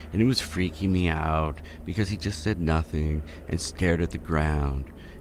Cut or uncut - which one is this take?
uncut